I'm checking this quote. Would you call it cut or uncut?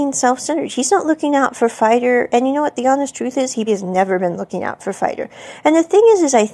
cut